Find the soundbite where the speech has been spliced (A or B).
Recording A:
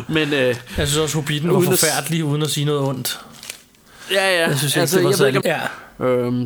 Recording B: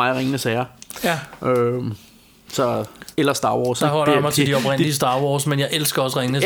A